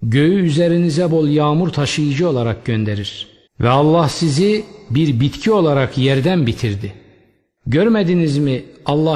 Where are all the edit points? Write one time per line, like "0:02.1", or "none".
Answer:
0:01.1
0:03.5
0:07.6